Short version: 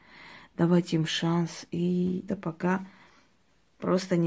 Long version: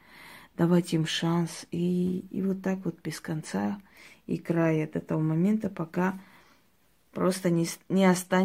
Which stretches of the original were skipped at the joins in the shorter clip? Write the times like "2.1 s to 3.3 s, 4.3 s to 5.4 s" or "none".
2.3 s to 5.6 s